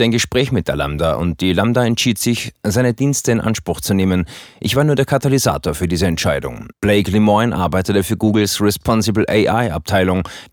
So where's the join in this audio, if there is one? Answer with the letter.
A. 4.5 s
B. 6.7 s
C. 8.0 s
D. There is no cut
B